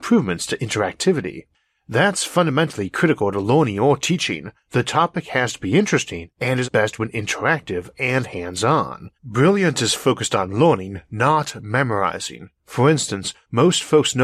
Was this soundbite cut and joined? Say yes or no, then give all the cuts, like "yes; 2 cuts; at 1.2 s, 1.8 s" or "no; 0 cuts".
yes; 2 cuts; at 6.6 s, 9.2 s